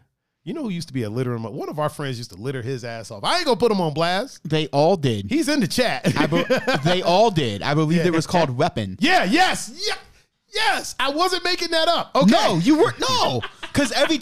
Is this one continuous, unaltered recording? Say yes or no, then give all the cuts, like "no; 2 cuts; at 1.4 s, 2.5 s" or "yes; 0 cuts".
yes; 0 cuts